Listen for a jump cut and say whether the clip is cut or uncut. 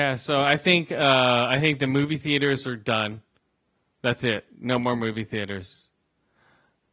uncut